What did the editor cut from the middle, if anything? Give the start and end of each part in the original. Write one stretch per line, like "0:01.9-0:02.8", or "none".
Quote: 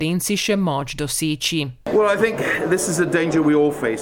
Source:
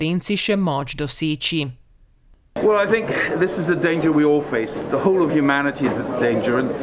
0:01.8-0:02.5

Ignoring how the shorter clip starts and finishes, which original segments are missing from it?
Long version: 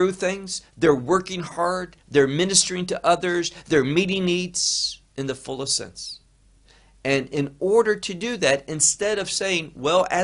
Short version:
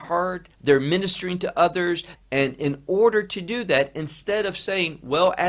0:03.6-0:06.9

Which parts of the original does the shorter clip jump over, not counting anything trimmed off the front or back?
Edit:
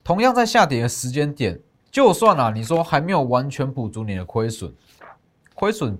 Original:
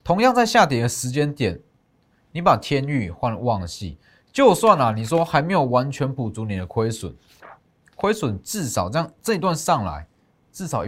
0:01.8-0:04.2

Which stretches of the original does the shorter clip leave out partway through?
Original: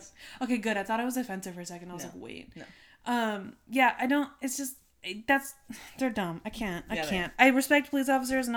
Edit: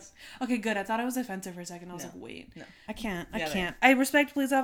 0:02.9-0:06.4

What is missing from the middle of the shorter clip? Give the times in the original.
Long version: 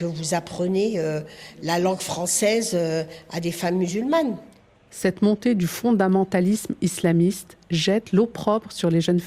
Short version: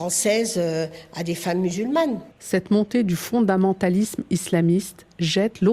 0:04.5-0:04.8

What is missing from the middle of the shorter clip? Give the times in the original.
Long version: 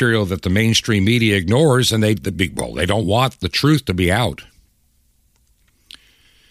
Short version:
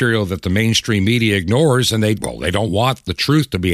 0:02.2-0:02.5

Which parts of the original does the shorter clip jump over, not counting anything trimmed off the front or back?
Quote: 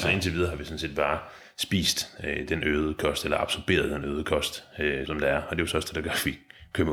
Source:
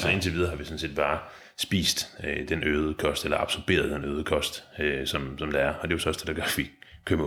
0:05.1-0:05.4

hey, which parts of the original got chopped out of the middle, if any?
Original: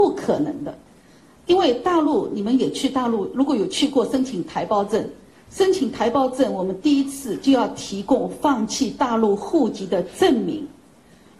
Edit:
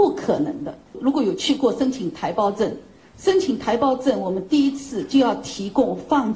0:00.9-0:03.3

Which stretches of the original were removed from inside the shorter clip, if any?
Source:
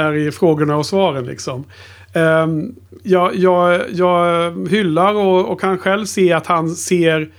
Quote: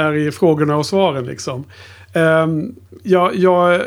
none

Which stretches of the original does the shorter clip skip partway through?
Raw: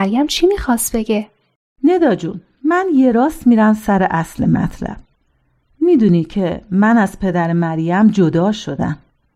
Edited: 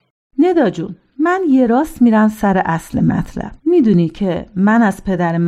0:05.0-0:05.7

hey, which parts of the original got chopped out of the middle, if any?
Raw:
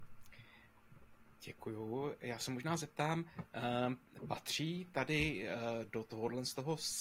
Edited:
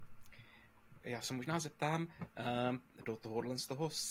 0:01.0-0:02.2
0:04.2-0:05.9

